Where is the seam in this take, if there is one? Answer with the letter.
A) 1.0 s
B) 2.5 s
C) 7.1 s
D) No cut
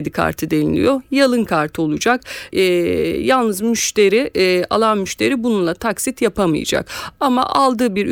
B